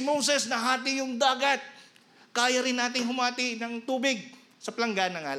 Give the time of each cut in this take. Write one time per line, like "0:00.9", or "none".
none